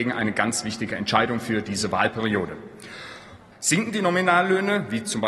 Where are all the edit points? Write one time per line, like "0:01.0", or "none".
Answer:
0:03.5